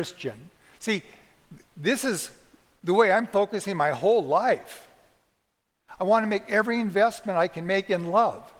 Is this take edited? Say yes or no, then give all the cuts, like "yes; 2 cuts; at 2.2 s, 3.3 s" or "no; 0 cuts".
yes; 1 cut; at 6.0 s